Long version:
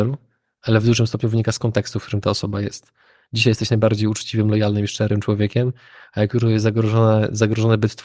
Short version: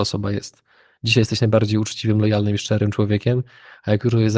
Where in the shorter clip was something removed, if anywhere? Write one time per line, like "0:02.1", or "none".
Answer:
none